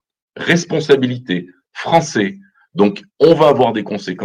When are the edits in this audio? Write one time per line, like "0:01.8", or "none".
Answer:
0:01.6
0:03.1